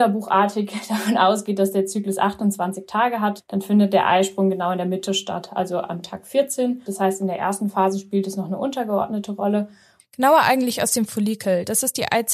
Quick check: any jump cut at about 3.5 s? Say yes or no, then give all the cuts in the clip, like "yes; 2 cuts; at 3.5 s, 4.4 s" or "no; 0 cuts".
no; 2 cuts; at 6.9 s, 10.0 s